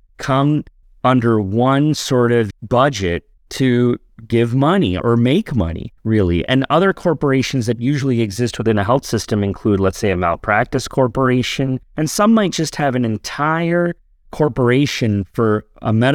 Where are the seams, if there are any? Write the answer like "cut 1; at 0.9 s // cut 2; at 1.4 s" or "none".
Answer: cut 1; at 11.8 s